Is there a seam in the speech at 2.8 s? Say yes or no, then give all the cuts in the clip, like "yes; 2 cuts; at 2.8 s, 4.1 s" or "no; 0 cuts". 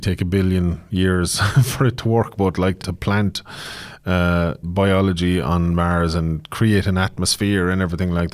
yes; 2 cuts; at 2.8 s, 4.6 s